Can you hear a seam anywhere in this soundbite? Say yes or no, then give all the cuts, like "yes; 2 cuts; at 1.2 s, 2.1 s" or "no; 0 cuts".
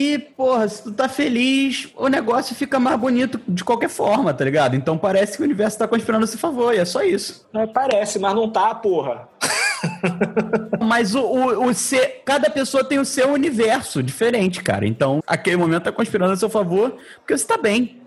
yes; 2 cuts; at 10.8 s, 15.2 s